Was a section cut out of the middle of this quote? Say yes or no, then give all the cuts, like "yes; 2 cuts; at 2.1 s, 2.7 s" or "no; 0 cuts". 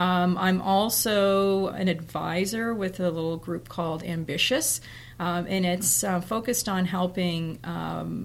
yes; 1 cut; at 1.7 s